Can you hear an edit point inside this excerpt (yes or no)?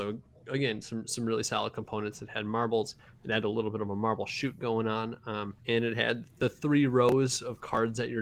yes